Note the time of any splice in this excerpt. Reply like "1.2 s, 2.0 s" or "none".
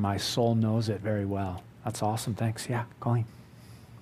1.7 s